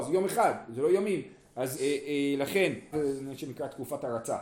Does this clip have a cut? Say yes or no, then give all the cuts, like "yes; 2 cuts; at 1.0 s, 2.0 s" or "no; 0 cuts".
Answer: yes; 2 cuts; at 1.7 s, 2.9 s